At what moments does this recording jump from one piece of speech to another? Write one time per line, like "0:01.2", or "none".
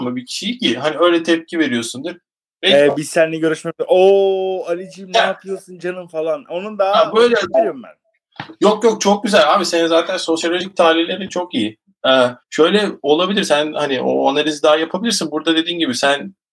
0:07.5
0:12.4